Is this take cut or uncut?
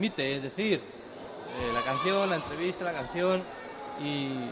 uncut